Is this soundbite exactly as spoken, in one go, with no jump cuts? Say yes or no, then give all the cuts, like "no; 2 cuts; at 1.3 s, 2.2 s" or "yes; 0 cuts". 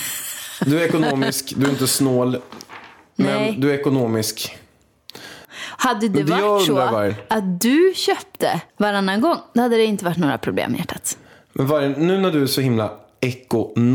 no; 2 cuts; at 5.4 s, 8.7 s